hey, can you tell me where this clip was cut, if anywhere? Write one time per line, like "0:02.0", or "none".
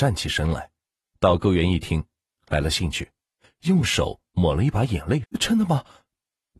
0:01.1
0:05.2